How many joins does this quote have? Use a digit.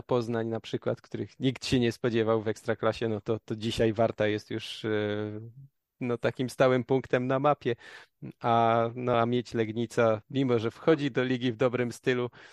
0